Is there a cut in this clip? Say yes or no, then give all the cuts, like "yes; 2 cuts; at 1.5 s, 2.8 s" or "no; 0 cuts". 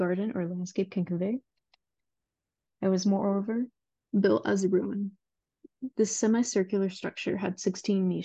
yes; 2 cuts; at 2.6 s, 5.9 s